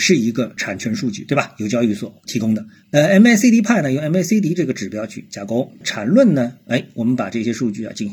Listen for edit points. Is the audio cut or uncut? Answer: cut